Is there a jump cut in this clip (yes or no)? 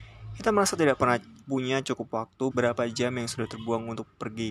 yes